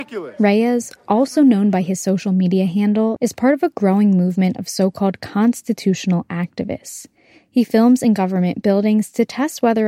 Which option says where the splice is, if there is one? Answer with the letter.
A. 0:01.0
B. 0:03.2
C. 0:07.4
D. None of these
B